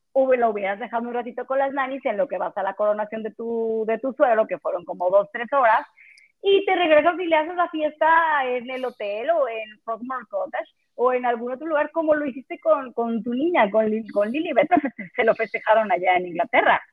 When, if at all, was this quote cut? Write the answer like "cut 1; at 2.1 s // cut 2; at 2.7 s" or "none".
cut 1; at 12.9 s // cut 2; at 14.7 s